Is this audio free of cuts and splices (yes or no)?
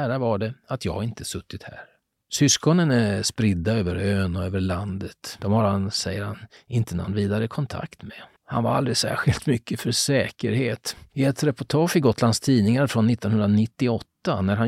no